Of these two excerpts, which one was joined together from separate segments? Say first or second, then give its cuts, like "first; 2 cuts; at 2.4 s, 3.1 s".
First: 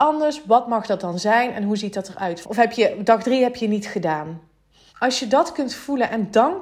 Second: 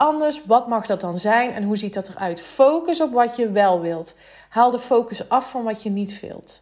first; 2 cuts; at 2.4 s, 4.9 s